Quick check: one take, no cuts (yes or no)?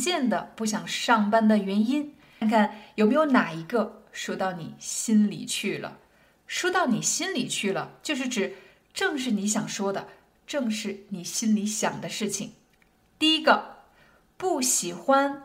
no